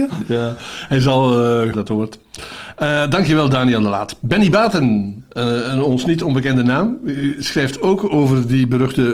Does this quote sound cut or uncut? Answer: cut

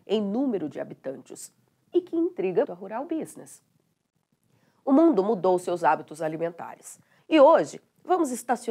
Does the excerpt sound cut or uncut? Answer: cut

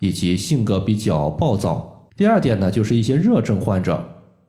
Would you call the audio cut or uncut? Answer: cut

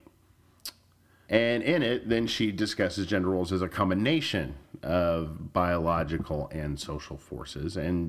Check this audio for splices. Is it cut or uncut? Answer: cut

